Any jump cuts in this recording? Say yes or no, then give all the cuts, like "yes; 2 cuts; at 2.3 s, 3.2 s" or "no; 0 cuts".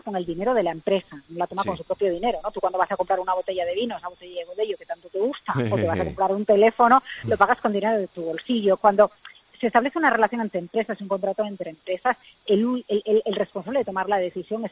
no; 0 cuts